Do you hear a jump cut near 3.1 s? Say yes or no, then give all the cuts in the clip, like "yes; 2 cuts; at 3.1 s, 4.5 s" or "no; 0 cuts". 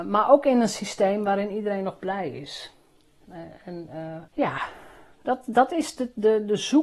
no; 1 cut; at 4.3 s